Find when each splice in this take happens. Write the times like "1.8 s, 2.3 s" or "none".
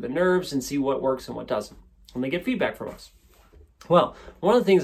none